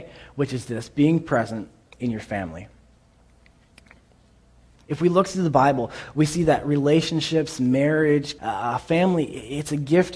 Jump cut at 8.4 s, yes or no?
yes